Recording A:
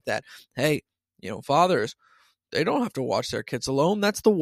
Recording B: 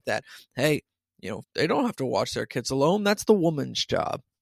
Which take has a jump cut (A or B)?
B